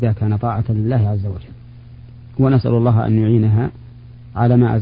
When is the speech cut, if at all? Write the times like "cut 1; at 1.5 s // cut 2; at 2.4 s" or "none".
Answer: none